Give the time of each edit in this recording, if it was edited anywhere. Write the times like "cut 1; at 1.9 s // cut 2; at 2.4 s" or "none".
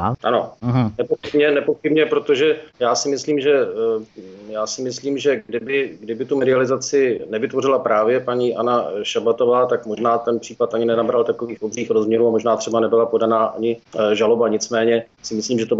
none